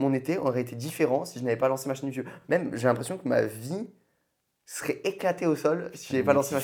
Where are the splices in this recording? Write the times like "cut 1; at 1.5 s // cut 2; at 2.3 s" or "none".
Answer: none